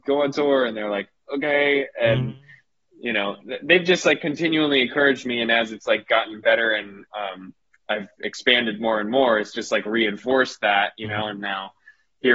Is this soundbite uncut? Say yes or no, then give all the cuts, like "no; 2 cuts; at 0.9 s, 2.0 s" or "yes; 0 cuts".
yes; 0 cuts